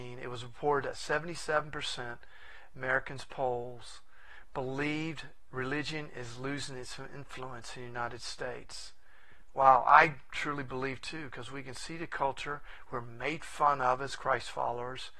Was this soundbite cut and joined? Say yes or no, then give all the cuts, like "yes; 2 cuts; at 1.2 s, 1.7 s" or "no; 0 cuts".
no; 0 cuts